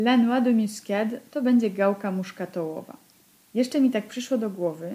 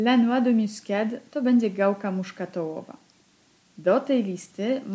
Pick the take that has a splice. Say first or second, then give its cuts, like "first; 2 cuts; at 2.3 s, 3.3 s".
first; 1 cut; at 3.4 s